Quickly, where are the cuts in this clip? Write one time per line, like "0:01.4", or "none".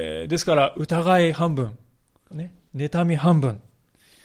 0:02.3